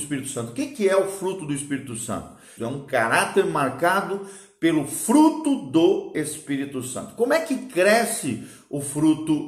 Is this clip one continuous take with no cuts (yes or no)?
no